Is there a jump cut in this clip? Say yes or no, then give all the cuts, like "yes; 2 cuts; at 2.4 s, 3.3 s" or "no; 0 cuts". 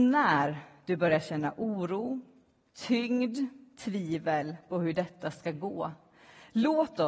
no; 0 cuts